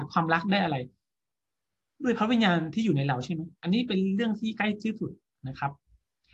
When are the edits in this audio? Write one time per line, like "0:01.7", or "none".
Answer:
0:03.5